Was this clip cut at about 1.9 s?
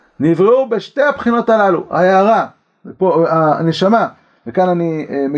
no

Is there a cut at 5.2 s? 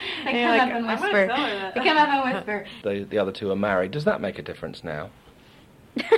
no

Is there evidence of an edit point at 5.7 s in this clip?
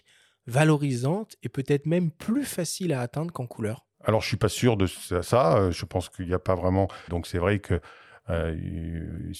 no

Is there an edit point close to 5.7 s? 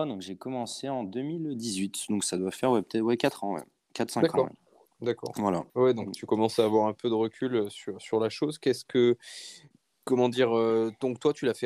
yes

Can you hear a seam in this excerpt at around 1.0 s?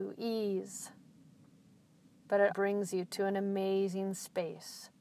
no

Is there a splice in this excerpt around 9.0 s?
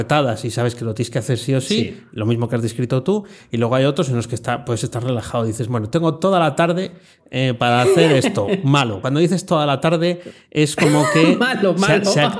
no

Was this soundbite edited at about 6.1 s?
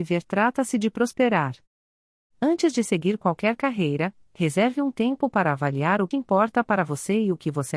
yes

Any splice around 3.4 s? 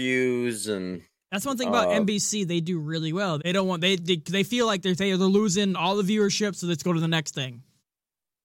yes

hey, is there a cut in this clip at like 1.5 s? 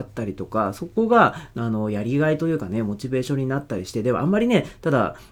yes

